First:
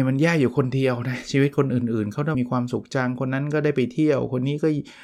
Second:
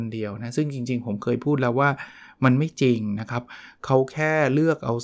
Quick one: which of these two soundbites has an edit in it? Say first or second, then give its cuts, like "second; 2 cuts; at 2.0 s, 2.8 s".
first; 1 cut; at 2.3 s